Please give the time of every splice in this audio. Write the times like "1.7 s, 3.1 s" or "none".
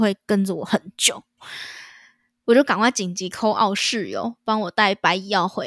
1.4 s